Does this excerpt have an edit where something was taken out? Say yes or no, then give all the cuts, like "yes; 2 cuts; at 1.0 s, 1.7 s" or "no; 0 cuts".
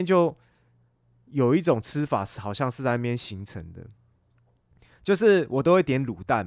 no; 0 cuts